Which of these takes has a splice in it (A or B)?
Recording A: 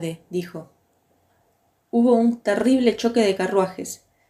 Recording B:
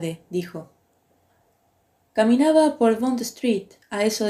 A